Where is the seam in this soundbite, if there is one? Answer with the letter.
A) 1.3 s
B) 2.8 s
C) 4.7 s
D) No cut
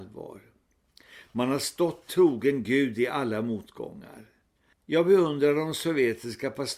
C